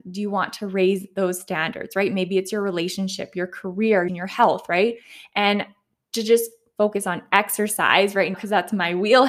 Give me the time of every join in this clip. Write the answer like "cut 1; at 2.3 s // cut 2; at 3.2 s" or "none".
cut 1; at 4.1 s // cut 2; at 8.3 s

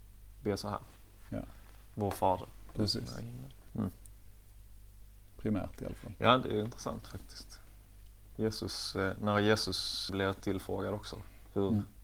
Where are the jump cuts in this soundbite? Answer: cut 1; at 3.7 s // cut 2; at 10.1 s

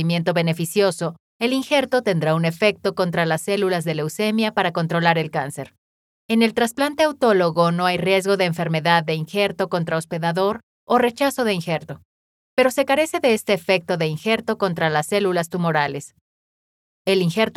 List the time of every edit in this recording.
cut 1; at 1.3 s // cut 2; at 6.2 s

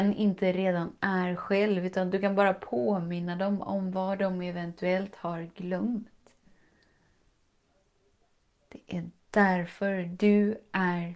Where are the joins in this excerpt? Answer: none

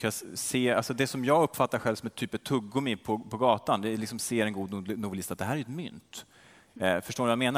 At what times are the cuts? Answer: none

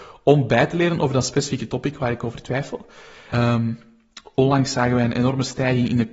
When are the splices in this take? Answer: cut 1; at 3.3 s

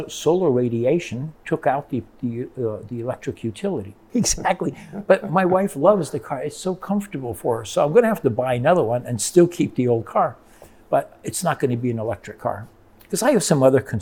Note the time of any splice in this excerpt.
cut 1; at 4.1 s

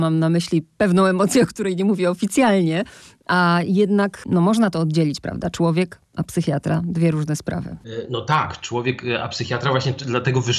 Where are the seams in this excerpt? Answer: none

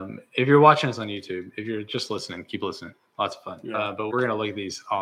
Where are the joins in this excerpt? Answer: cut 1; at 4.1 s

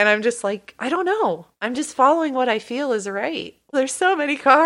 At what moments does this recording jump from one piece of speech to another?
cut 1; at 3.7 s

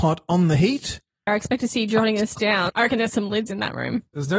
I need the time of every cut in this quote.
cut 1; at 1.3 s // cut 2; at 2.7 s

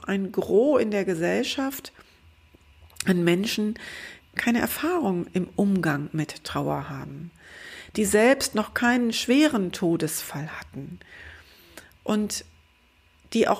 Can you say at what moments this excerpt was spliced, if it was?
cut 1; at 4.2 s

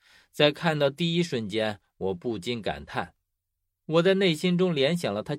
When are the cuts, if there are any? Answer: none

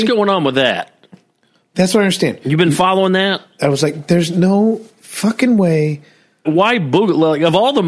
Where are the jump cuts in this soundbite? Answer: cut 1; at 3.6 s // cut 2; at 6.4 s

